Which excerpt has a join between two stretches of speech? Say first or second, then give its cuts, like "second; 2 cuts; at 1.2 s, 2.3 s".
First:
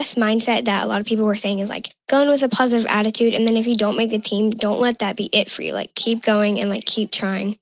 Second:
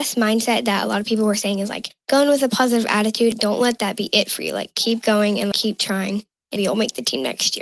second; 3 cuts; at 3.3 s, 5.5 s, 6.6 s